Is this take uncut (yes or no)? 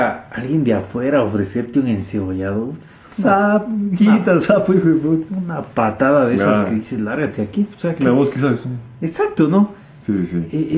yes